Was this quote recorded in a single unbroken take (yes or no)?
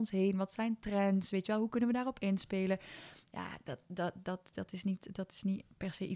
yes